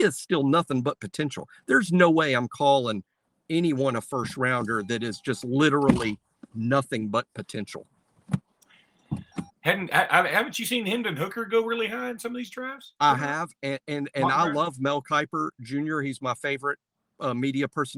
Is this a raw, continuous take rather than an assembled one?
no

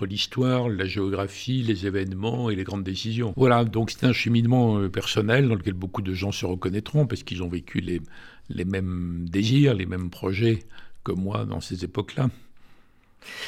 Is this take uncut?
no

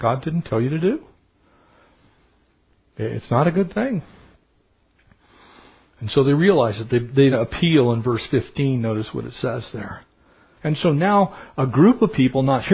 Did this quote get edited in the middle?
yes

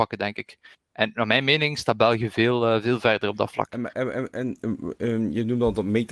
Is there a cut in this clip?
no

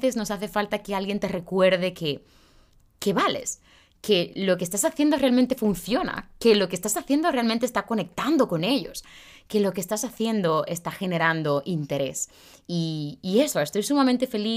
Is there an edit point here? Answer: no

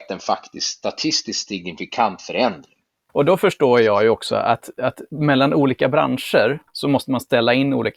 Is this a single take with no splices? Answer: no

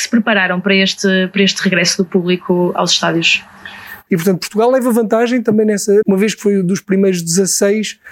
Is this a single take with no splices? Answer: no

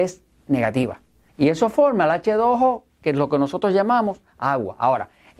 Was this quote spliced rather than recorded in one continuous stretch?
yes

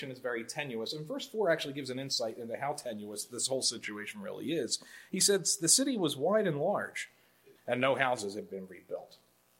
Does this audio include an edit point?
yes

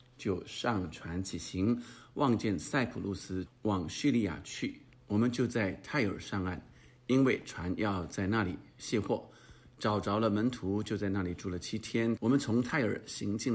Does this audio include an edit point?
yes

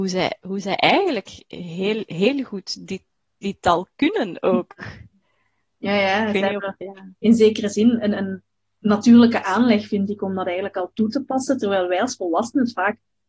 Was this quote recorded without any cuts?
yes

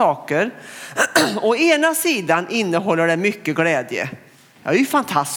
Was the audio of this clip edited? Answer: no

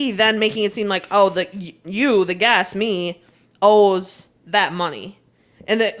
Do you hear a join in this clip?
no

